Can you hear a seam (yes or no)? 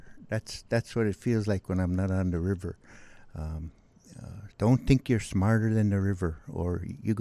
yes